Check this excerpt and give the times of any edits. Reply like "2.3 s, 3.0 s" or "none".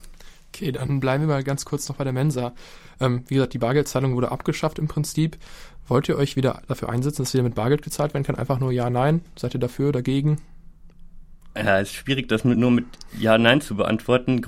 none